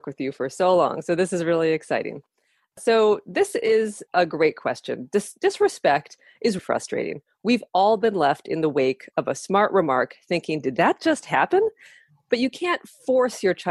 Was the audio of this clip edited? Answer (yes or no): yes